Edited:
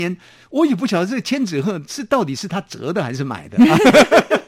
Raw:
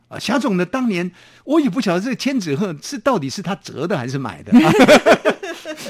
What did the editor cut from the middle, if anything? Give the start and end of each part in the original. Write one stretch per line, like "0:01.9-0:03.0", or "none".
none